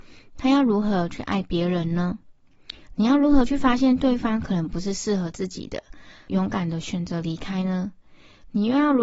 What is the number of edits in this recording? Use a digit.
0